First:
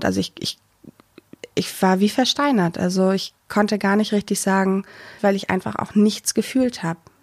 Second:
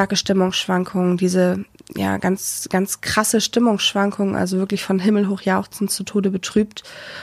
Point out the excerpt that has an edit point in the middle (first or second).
first